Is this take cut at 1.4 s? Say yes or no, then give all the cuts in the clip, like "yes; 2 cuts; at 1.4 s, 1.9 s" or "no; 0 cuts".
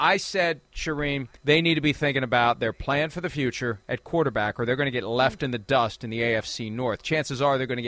yes; 1 cut; at 1.4 s